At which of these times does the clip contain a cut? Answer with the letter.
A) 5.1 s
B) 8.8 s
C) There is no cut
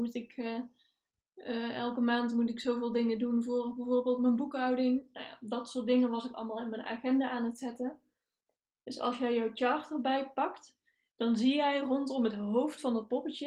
B